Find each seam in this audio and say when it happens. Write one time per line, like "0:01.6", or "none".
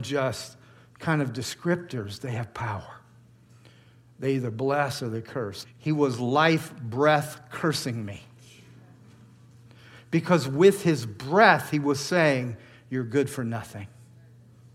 0:05.6